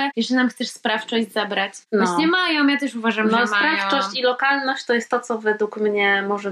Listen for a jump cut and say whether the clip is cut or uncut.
uncut